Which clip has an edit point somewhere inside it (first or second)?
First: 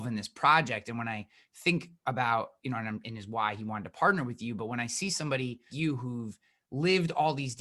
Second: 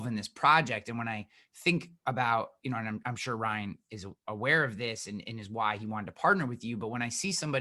first